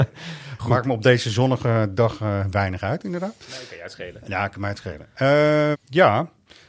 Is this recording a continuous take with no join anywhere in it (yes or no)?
no